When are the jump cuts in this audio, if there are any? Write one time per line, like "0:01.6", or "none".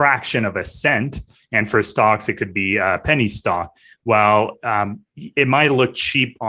none